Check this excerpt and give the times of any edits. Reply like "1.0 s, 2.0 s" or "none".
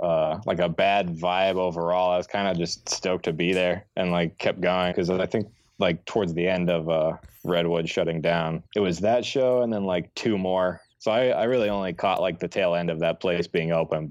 4.9 s, 8.7 s, 10.9 s